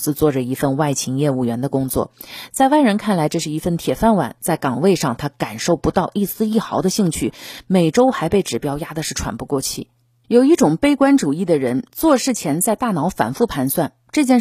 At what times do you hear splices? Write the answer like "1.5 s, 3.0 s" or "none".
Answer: 4.4 s, 10.2 s